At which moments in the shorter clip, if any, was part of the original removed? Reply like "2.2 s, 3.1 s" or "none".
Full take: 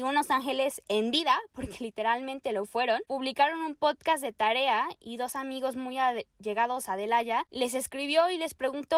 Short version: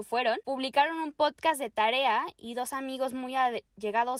none